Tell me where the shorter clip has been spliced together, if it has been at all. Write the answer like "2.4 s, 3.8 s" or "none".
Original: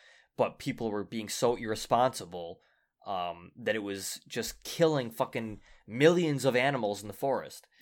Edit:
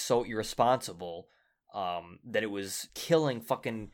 2.9 s